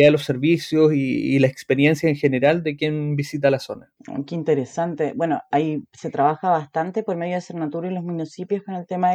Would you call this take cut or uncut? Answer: uncut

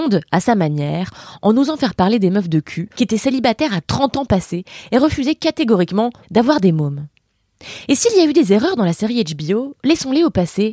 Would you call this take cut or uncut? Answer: cut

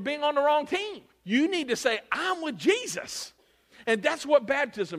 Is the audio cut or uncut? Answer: cut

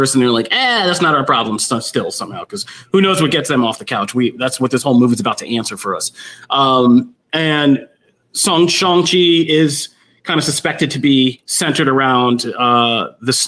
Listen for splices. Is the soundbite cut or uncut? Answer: uncut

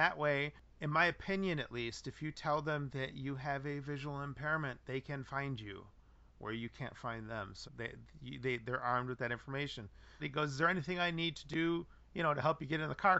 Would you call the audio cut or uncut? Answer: cut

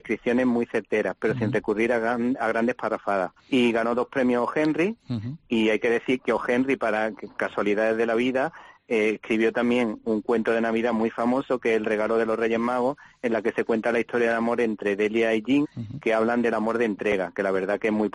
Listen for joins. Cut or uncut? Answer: cut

